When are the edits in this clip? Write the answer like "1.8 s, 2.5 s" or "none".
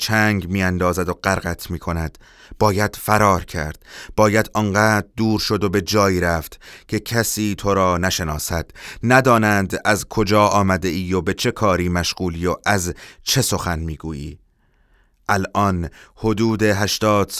none